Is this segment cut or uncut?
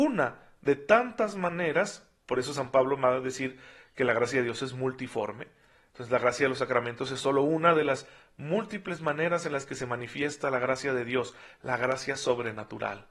uncut